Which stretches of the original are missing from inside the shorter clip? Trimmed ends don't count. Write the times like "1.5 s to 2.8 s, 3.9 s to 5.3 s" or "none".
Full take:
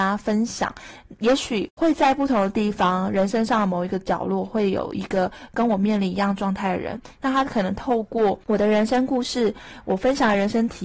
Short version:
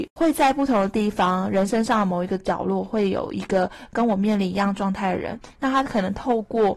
none